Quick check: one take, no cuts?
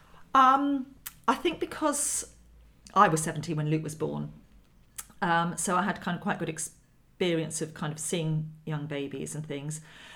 yes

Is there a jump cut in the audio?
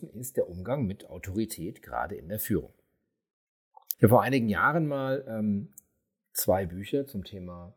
yes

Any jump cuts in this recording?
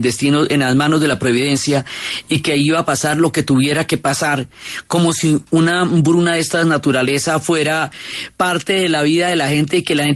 no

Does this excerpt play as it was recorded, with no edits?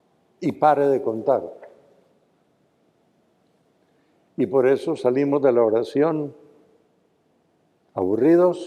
yes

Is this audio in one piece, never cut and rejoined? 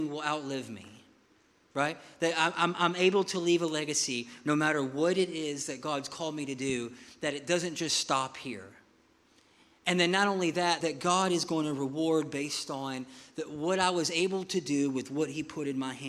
no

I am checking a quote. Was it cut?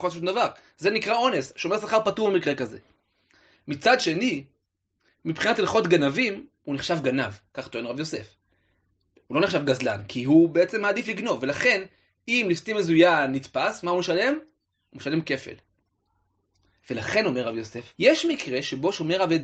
yes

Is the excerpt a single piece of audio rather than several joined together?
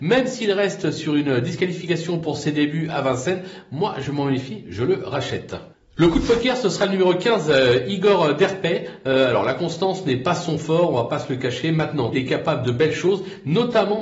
no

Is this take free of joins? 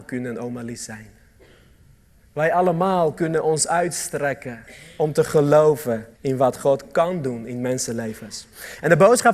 no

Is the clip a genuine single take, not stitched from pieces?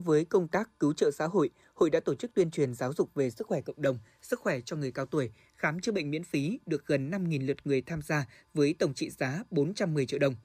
yes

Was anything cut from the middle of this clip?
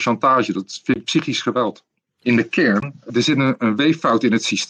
yes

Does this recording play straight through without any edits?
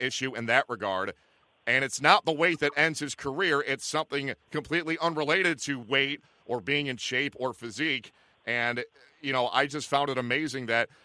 yes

